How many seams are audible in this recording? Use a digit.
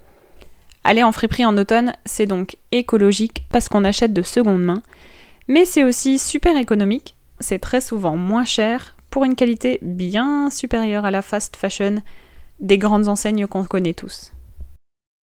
2